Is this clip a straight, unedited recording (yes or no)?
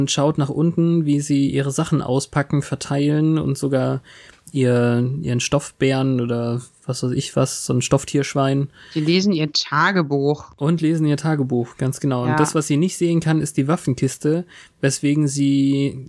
yes